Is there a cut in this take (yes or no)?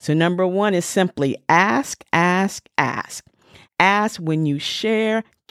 yes